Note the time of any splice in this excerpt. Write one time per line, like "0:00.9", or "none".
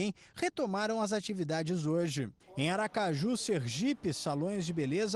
0:02.4